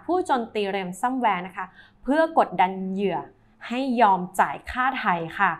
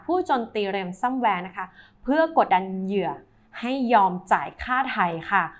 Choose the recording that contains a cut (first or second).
second